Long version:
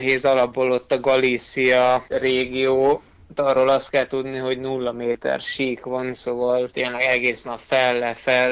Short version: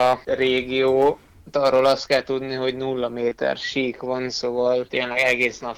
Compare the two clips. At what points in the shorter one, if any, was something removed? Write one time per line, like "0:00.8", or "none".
none